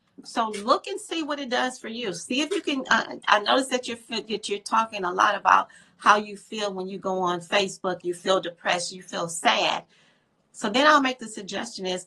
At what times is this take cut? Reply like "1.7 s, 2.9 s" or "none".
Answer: 8.0 s